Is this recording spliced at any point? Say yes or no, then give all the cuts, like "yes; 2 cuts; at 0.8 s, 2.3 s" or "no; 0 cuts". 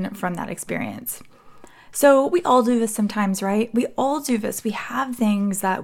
no; 0 cuts